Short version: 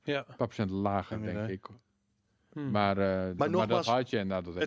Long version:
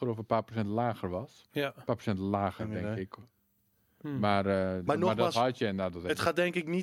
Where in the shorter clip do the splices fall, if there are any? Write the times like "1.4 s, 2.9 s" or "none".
none

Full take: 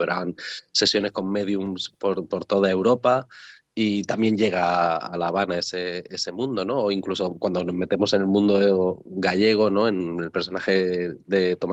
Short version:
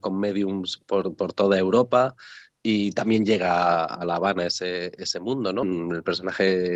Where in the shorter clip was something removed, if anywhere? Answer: 5.6 s

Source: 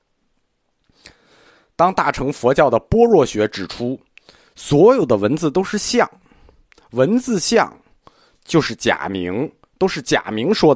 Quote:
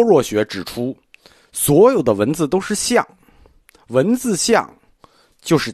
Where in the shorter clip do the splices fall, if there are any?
none

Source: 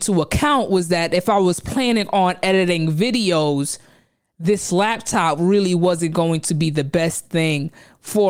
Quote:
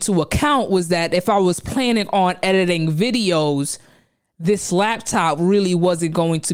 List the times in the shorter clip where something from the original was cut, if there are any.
none

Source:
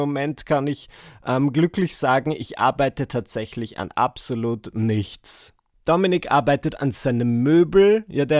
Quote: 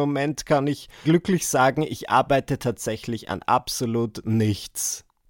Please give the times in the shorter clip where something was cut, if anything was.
1.0 s

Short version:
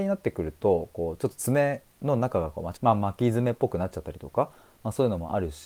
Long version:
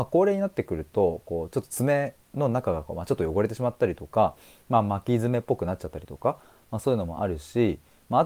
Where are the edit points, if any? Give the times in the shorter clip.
2.7 s

